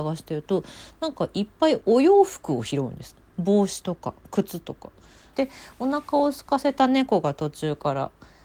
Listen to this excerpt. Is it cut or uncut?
cut